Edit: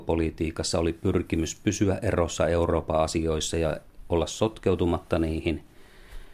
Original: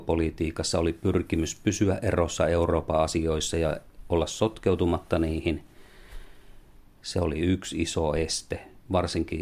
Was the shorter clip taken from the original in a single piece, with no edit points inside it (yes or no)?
yes